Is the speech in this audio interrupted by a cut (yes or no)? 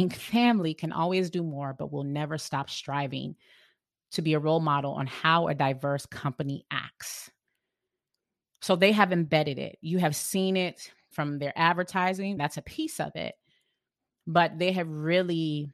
yes